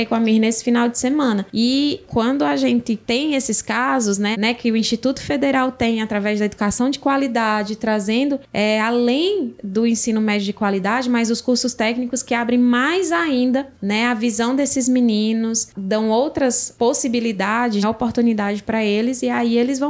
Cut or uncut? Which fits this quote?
cut